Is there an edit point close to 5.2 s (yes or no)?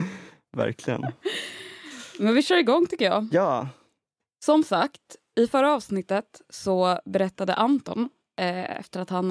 no